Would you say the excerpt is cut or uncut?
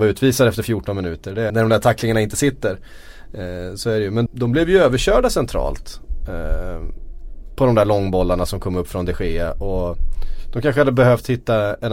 cut